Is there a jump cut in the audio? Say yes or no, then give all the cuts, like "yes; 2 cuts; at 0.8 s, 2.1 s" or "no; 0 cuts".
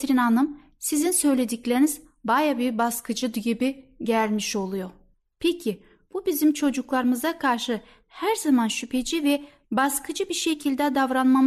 no; 0 cuts